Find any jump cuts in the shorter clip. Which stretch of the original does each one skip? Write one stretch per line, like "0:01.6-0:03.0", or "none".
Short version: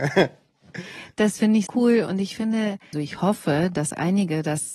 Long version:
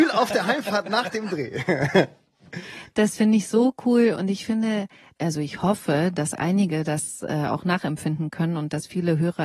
0:03.5-0:03.8
0:05.0-0:05.3